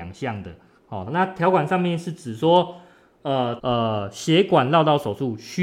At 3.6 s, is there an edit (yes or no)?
yes